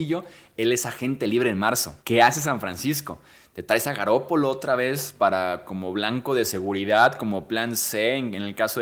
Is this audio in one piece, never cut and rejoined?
no; 1 cut; at 2.0 s

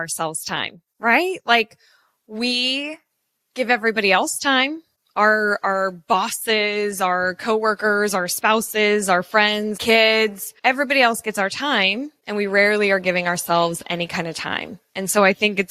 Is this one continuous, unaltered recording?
no; 1 cut; at 9.7 s

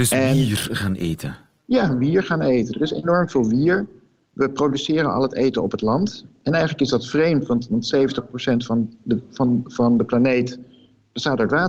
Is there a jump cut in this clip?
no; 0 cuts

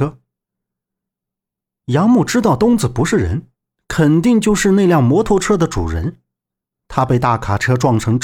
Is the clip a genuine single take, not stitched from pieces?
yes; 0 cuts

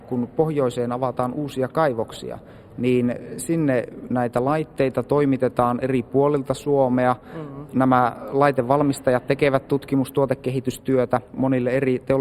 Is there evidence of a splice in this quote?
yes; 1 cut; at 11.3 s

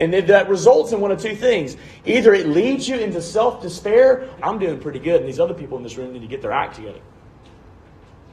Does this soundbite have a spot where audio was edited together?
yes; 1 cut; at 4.4 s

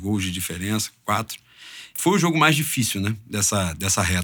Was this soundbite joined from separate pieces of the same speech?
yes; 1 cut; at 1.9 s

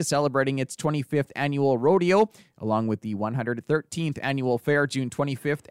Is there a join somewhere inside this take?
no; 0 cuts

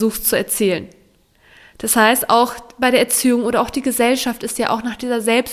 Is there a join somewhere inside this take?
no; 0 cuts

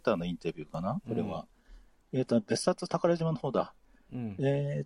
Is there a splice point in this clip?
no; 0 cuts

